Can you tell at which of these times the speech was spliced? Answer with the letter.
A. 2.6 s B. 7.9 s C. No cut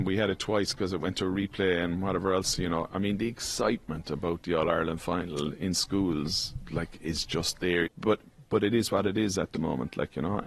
B